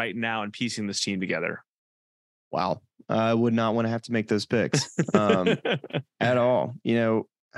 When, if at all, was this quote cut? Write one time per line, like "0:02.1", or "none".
none